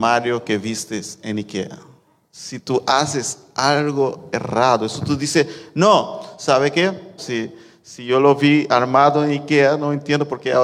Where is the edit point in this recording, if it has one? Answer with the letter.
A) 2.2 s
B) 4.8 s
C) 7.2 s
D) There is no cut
C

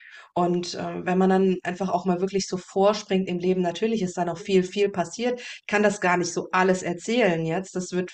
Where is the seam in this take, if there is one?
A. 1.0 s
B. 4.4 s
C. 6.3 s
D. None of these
B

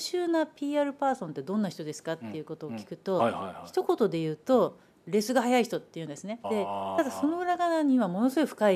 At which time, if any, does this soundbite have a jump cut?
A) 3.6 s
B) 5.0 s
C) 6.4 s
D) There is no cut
C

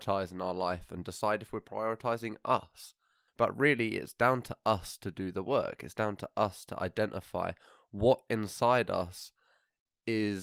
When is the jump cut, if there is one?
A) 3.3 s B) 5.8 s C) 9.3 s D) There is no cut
A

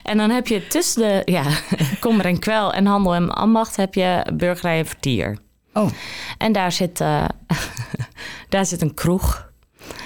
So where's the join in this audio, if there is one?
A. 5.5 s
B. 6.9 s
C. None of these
C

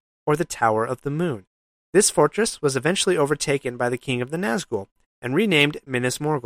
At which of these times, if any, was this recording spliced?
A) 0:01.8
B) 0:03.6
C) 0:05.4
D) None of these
D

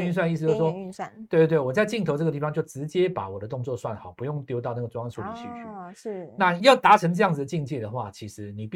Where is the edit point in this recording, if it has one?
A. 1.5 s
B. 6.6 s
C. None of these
B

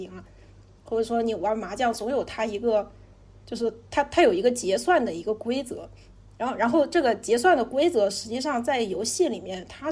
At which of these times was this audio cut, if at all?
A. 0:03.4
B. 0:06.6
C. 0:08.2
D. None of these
A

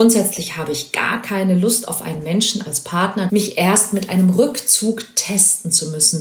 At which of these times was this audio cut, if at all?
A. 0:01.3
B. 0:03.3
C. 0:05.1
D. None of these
B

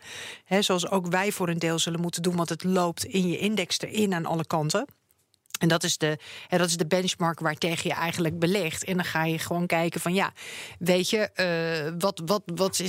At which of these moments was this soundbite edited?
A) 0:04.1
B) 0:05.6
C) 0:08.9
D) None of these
D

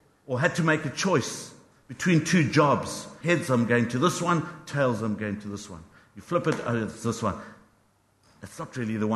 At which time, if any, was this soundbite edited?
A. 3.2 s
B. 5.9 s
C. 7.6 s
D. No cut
A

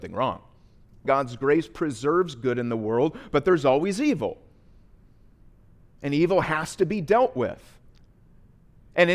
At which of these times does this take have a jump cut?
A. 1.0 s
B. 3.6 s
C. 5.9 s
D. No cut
A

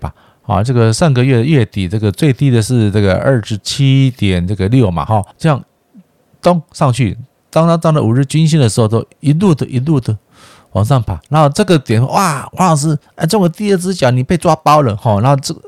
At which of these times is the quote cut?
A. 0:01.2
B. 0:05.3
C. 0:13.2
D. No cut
B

